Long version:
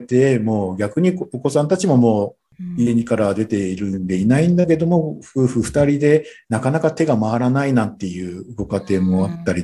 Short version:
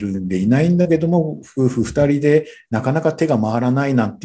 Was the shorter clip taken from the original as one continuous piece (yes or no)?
yes